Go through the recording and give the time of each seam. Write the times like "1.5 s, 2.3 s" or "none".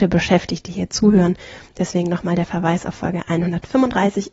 none